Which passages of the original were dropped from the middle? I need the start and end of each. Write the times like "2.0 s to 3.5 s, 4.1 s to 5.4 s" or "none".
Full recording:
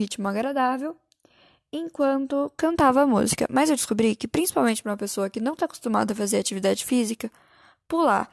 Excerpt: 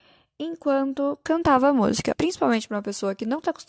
3.5 s to 4.3 s